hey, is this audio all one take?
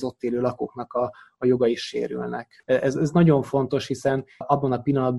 no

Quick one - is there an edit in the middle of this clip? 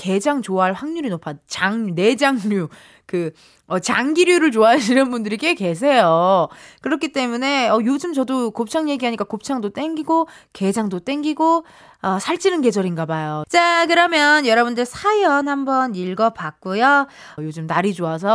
yes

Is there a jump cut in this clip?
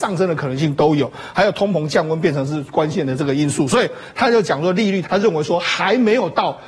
yes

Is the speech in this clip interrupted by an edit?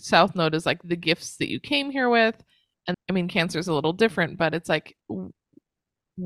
yes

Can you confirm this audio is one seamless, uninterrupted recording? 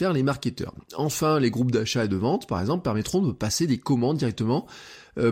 yes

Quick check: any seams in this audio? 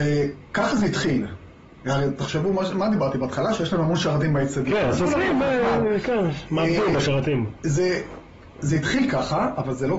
no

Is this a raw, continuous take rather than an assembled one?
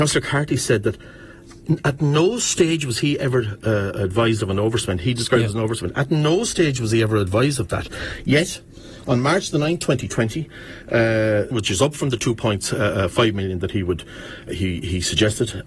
no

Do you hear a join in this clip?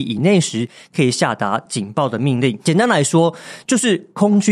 no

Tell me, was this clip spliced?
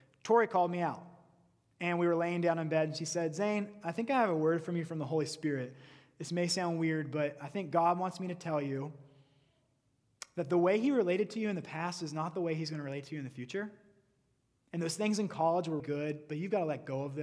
yes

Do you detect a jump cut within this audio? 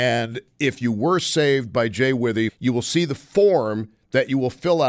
yes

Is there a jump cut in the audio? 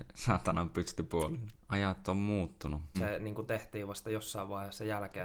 yes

